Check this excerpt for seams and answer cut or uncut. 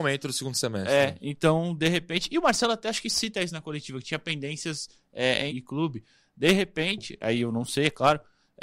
cut